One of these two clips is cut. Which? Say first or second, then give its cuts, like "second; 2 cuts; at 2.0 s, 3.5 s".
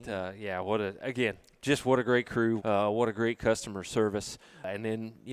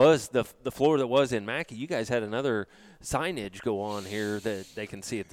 first; 1 cut; at 2.6 s